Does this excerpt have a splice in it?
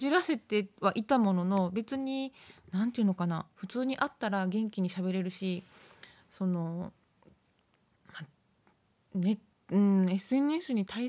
no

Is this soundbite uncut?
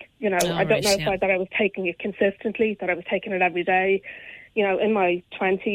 yes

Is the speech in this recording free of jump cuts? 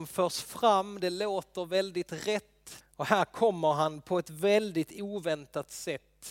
no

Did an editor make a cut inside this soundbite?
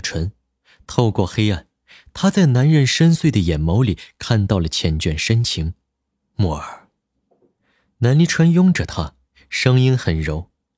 yes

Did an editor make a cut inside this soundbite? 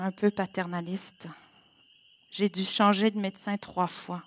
no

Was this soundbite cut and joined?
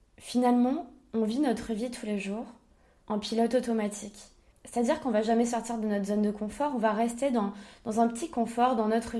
no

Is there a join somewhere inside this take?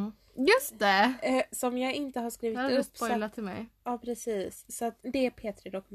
yes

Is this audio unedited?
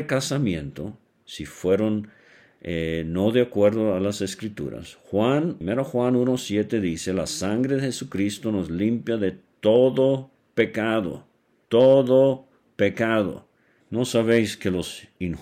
no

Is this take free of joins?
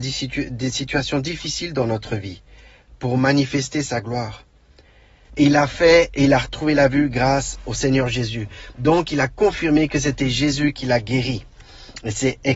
no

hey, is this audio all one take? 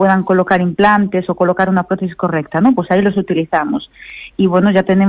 yes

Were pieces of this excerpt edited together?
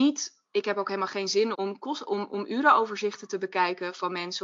yes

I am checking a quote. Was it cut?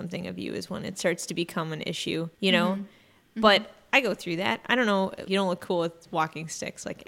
yes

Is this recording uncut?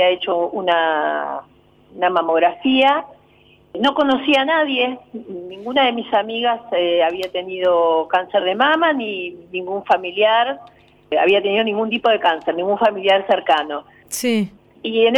no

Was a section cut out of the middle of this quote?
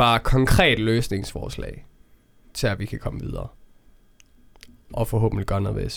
no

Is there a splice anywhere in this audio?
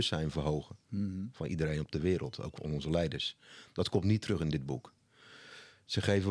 no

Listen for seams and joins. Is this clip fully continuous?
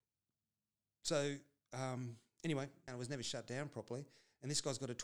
no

